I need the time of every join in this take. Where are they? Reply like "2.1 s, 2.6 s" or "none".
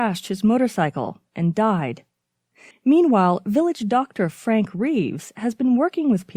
2.7 s